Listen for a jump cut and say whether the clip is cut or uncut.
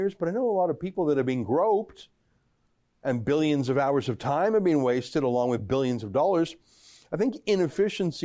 uncut